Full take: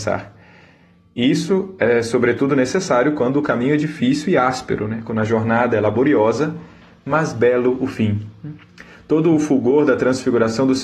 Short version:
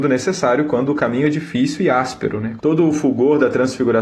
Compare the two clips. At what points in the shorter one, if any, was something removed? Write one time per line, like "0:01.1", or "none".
0:02.6